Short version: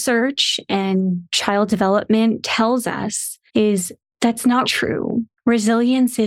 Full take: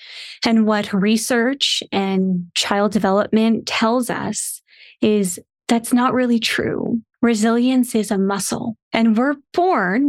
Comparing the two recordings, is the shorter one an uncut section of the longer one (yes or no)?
no